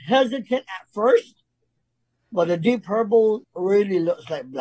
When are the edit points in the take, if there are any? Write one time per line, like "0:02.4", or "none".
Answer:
0:03.4